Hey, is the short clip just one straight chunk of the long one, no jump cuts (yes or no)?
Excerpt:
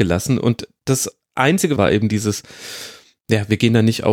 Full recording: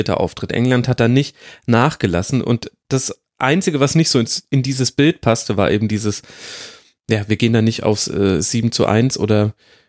no